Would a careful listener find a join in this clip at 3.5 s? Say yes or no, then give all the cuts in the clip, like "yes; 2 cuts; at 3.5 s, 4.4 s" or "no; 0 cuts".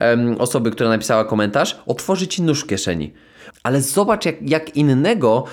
yes; 1 cut; at 3.5 s